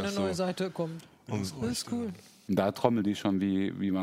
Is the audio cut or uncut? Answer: cut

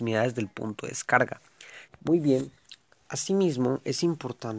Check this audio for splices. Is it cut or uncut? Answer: cut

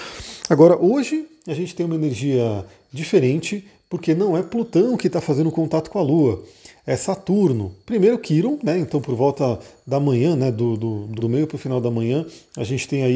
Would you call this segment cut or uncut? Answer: cut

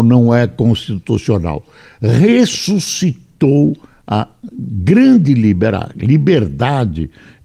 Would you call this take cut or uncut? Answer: uncut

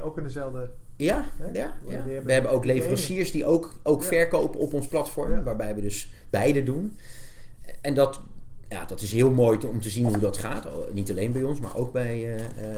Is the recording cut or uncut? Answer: uncut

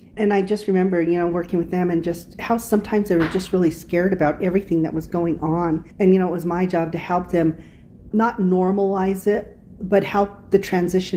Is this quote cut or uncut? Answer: cut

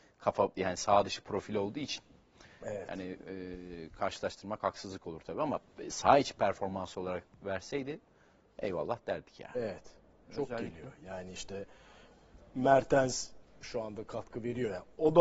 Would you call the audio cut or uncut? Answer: cut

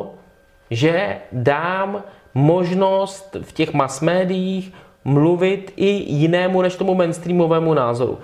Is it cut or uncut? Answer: uncut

